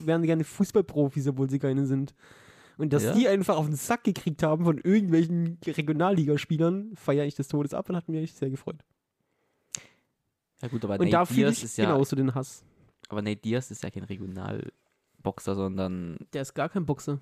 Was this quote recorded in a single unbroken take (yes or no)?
yes